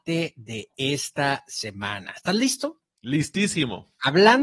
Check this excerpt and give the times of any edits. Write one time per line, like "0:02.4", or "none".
none